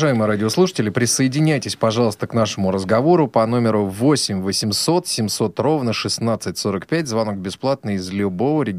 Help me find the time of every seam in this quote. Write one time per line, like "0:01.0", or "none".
none